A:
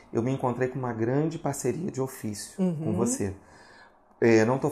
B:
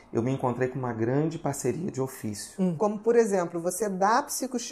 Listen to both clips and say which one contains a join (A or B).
B